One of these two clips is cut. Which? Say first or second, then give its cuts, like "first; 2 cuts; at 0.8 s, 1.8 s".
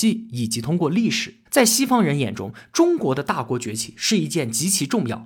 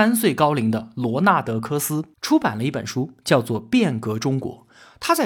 first; 1 cut; at 1.5 s